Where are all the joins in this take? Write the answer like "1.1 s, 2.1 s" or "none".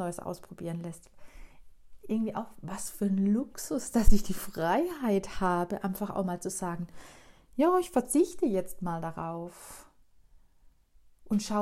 none